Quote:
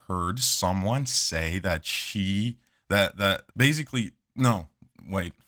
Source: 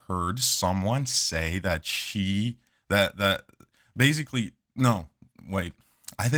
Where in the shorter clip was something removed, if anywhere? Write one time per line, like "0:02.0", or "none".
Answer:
0:03.5